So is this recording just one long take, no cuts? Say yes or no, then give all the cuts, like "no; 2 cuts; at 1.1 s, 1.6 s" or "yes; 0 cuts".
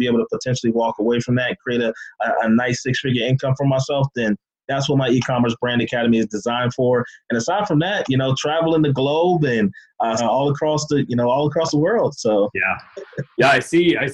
no; 1 cut; at 10.2 s